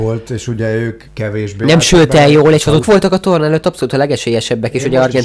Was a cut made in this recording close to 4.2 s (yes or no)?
no